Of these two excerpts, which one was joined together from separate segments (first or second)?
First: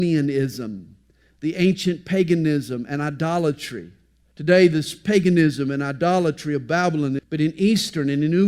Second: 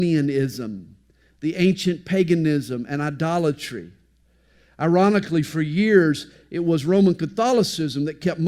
first